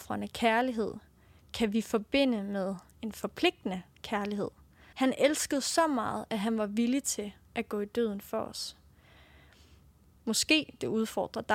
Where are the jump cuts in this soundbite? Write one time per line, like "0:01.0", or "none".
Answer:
0:04.9
0:10.2